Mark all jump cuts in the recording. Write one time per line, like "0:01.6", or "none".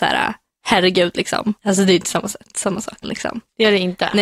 0:01.6
0:03.0